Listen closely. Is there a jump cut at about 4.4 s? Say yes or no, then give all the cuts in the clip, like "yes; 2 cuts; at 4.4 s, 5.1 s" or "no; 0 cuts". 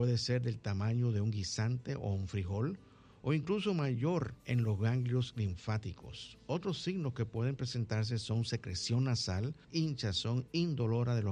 yes; 2 cuts; at 4.4 s, 9.6 s